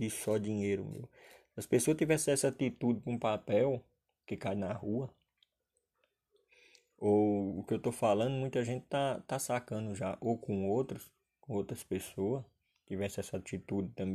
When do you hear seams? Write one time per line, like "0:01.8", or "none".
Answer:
none